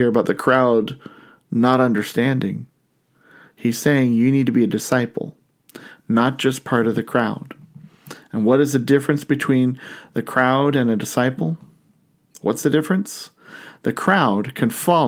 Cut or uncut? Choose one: uncut